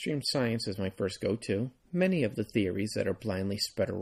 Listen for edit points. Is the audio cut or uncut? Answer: cut